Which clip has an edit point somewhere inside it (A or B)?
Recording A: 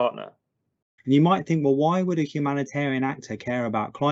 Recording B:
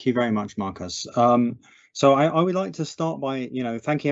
A